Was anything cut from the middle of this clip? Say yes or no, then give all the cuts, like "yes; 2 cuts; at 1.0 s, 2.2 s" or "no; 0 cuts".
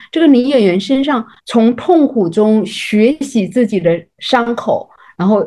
yes; 1 cut; at 1.4 s